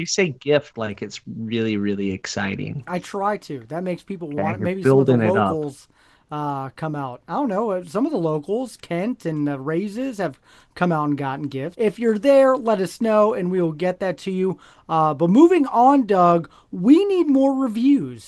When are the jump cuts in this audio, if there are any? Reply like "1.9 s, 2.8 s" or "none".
11.7 s